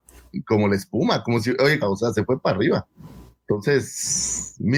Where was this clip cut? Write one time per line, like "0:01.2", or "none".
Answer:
0:01.8